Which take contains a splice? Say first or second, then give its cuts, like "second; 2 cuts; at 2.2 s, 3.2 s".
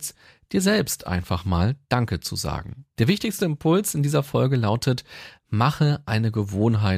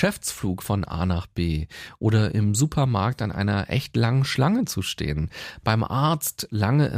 first; 1 cut; at 3.0 s